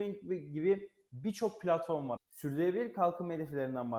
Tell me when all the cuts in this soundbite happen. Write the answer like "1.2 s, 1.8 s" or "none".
2.2 s